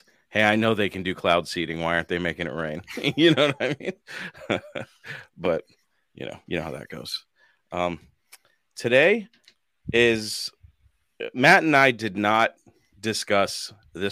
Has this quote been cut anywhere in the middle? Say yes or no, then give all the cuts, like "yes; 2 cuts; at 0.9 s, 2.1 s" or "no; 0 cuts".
no; 0 cuts